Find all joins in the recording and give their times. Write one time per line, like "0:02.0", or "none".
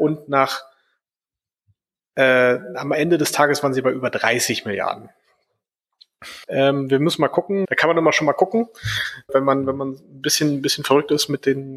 0:06.4
0:07.6
0:09.3

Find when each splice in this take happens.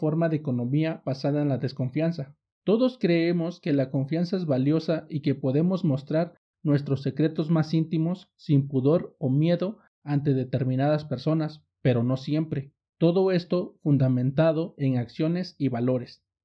0:02.5
0:12.9

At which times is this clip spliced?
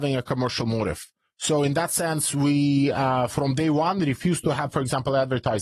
none

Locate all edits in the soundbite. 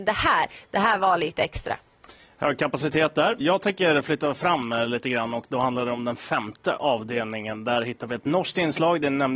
0:03.4

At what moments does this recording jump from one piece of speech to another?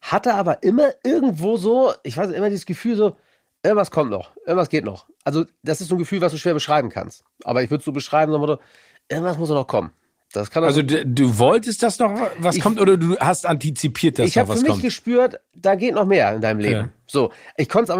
none

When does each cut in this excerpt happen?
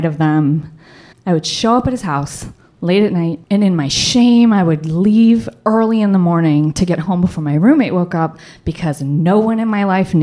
0:01.1
0:03.4

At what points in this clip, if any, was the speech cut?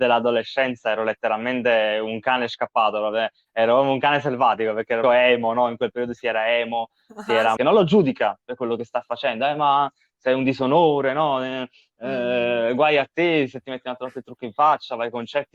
0:05.0
0:07.6

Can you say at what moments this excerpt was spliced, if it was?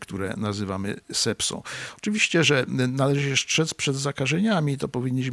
none

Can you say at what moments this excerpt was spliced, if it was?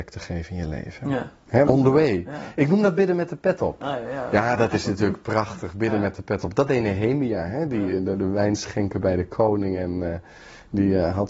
0:01.6
0:08.0

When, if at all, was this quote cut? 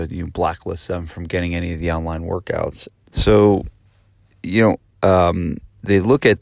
0:02.9
0:04.9

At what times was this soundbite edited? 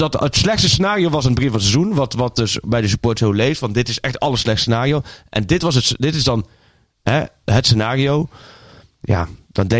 none

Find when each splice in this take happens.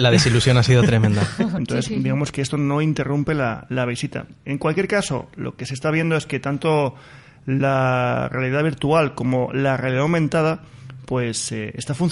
0:01.6

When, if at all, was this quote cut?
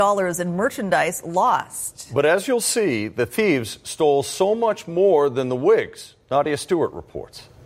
none

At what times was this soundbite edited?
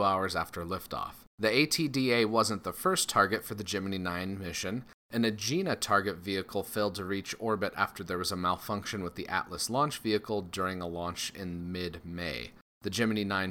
none

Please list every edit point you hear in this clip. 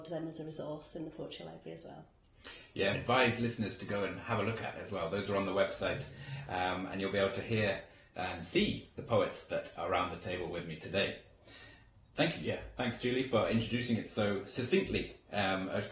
0:02.9

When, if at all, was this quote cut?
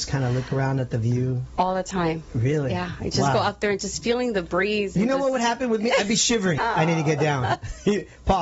0:06.6

